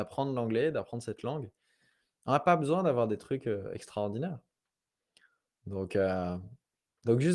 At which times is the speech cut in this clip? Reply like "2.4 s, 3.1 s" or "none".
none